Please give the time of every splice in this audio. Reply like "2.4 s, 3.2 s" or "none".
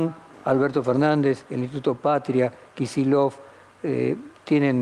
none